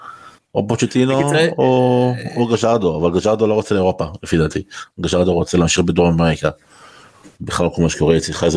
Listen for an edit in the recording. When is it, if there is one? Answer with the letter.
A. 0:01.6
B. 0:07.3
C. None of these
B